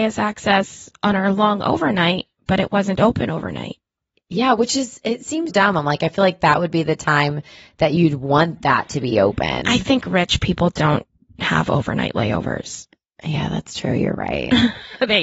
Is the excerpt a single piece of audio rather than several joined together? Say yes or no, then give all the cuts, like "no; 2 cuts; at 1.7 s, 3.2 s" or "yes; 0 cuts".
no; 1 cut; at 5.5 s